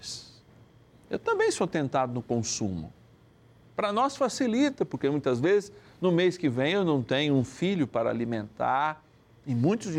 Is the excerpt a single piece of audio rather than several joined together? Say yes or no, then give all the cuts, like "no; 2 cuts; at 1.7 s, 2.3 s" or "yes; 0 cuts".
yes; 0 cuts